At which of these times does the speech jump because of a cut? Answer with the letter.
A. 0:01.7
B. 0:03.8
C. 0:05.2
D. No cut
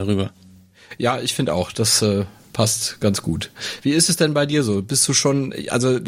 D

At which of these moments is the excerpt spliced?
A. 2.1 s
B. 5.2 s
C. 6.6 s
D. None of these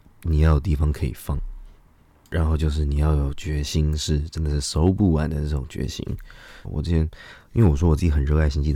C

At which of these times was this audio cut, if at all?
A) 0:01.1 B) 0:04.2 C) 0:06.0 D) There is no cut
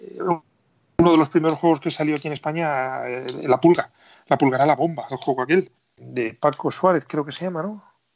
C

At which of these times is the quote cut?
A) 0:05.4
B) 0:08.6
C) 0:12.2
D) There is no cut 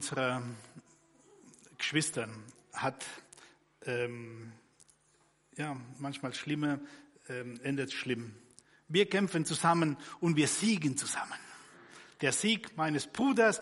D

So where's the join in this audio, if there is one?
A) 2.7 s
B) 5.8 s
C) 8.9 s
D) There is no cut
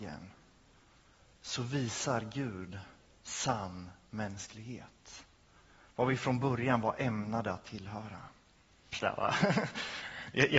C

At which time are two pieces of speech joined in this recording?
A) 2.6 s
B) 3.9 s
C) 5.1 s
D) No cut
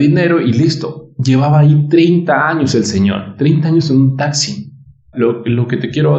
C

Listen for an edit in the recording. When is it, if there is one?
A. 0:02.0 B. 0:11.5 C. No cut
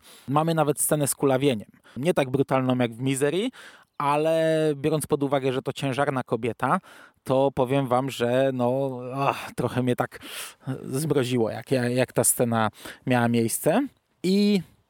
A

